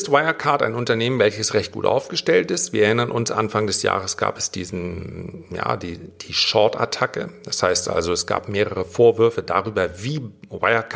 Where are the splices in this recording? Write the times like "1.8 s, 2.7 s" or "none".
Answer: none